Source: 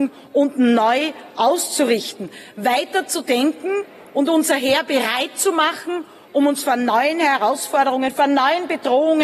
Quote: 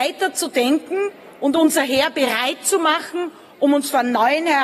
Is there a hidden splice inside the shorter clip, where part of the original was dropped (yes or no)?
no